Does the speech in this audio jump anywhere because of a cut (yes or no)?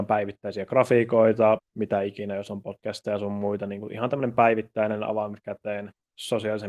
yes